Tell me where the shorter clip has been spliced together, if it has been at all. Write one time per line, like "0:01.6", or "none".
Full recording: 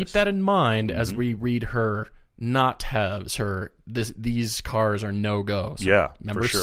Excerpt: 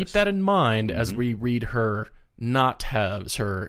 none